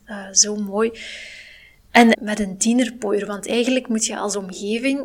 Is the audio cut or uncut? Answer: cut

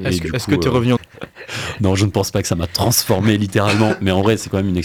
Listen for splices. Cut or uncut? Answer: cut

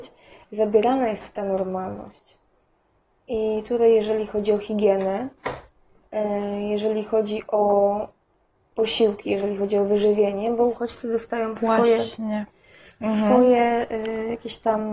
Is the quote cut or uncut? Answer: uncut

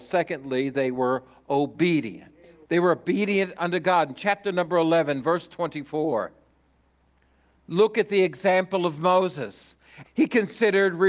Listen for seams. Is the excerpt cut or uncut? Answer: cut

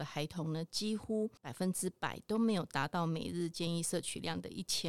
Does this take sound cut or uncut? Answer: cut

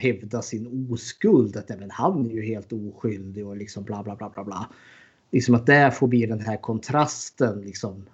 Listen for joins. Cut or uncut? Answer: uncut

